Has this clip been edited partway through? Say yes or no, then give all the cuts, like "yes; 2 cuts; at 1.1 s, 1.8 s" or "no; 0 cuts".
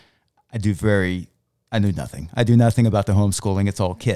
no; 0 cuts